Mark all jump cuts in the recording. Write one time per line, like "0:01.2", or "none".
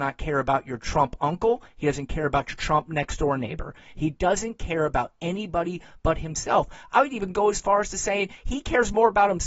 0:01.7